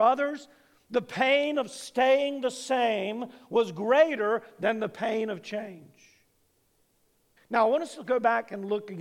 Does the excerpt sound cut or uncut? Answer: cut